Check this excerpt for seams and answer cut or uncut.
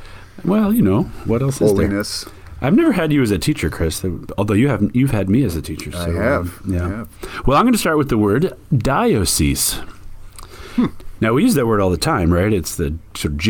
uncut